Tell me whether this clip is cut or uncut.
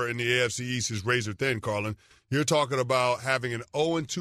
uncut